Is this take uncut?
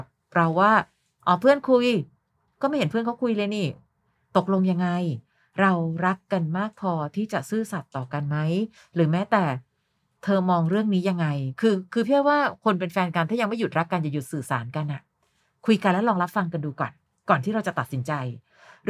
yes; 0 cuts

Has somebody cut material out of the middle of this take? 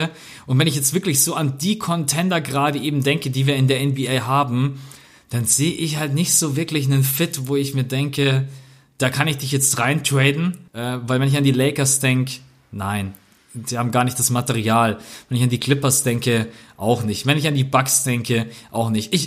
yes; 1 cut; at 10.7 s

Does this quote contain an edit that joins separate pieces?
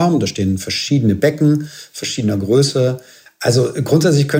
yes; 1 cut; at 3.3 s

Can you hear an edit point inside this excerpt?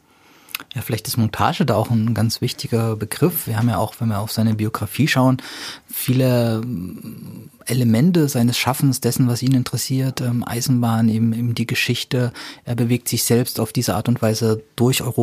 no; 0 cuts

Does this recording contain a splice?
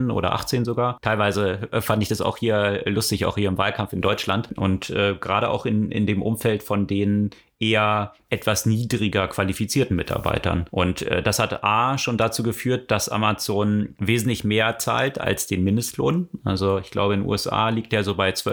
yes; 1 cut; at 4.6 s

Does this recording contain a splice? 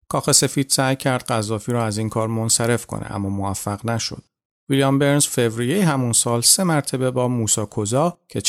no; 0 cuts

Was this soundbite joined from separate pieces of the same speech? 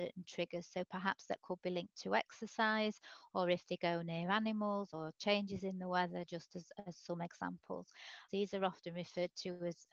yes; 1 cut; at 8.3 s

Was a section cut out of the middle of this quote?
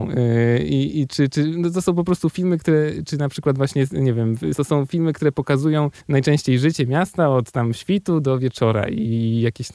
yes; 2 cuts; at 4.5 s, 6.0 s

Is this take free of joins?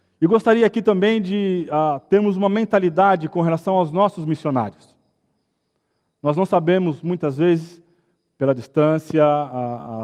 yes; 0 cuts

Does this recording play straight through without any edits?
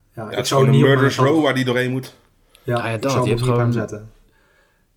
yes; 0 cuts

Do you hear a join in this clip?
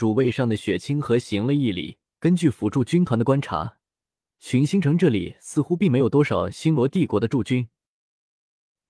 yes; 1 cut; at 2.2 s

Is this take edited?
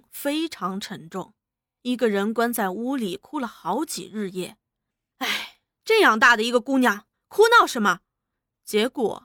yes; 2 cuts; at 5.1 s, 7.1 s

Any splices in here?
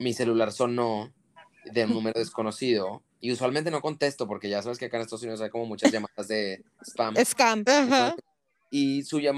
yes; 1 cut; at 7.7 s

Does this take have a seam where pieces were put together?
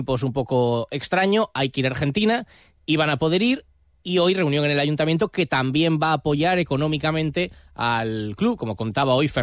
no; 0 cuts

